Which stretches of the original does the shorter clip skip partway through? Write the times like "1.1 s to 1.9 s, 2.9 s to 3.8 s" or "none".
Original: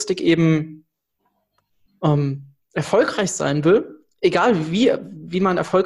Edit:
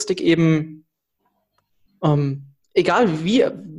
2.6 s to 4.1 s